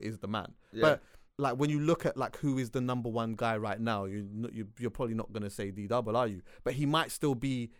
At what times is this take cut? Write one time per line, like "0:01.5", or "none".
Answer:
0:01.3